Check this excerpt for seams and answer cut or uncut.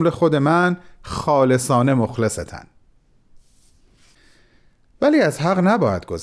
uncut